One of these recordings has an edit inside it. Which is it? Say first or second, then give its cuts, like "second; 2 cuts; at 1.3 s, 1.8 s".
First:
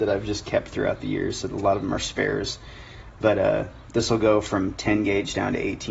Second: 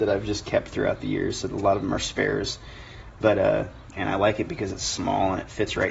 second; 1 cut; at 3.9 s